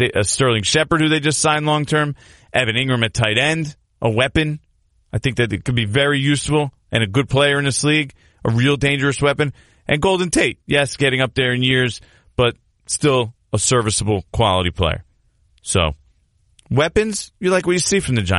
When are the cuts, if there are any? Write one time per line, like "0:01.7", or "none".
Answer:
none